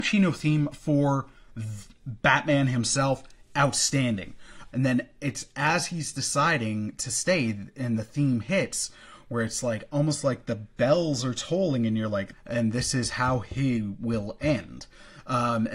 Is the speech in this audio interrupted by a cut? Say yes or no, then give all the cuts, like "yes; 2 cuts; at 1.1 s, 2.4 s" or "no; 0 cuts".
yes; 2 cuts; at 4.7 s, 12.3 s